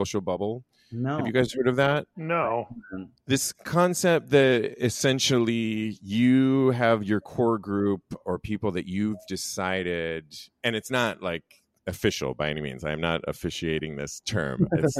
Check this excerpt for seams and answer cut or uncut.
uncut